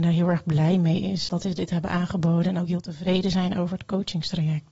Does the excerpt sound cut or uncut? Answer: cut